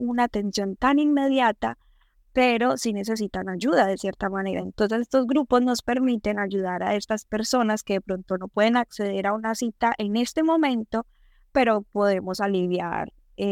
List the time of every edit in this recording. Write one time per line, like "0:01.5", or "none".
none